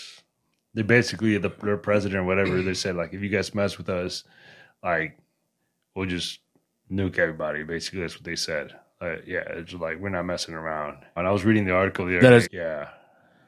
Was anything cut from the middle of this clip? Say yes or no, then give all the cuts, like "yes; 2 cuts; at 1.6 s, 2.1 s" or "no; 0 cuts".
yes; 2 cuts; at 11.2 s, 12.4 s